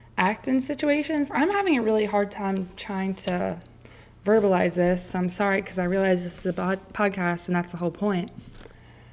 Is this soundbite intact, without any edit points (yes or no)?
yes